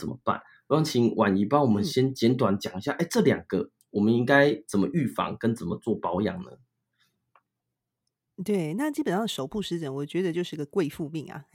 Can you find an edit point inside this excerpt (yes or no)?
no